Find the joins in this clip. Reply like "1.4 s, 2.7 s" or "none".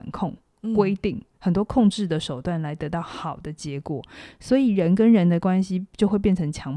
1.3 s